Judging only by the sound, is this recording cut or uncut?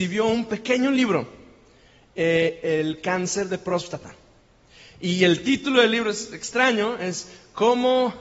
cut